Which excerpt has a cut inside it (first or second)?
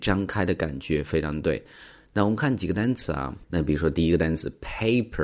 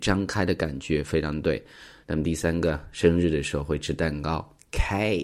second